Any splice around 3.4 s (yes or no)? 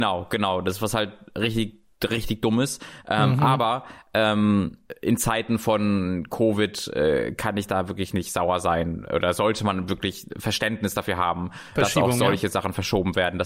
no